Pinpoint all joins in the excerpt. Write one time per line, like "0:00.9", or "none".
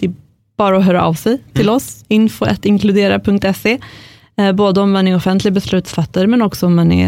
none

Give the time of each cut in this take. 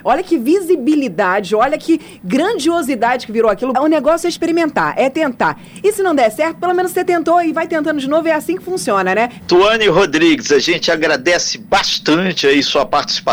0:03.7
0:09.4

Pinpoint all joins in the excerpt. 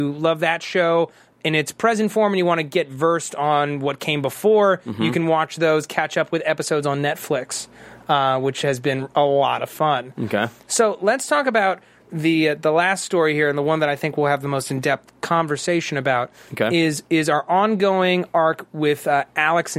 none

